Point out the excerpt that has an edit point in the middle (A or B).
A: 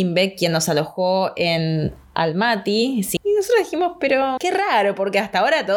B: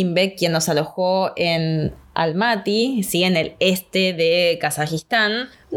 A